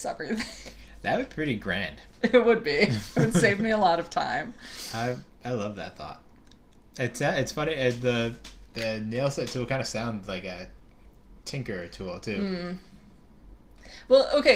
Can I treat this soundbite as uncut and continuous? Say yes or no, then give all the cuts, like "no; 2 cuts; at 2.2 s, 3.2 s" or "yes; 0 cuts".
yes; 0 cuts